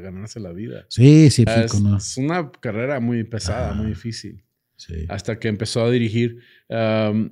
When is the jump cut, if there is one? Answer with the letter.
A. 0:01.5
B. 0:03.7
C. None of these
A